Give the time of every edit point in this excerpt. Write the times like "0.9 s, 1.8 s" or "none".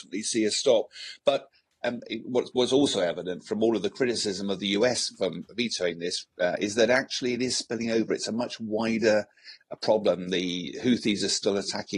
none